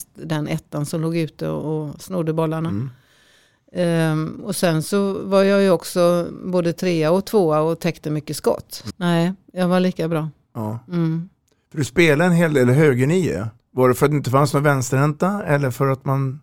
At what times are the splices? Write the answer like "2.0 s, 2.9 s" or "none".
8.9 s, 13.6 s